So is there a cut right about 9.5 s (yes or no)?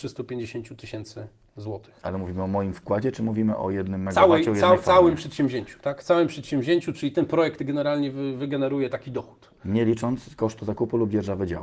no